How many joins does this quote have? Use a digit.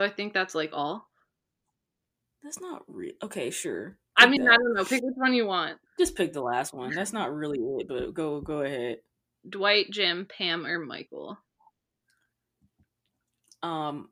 2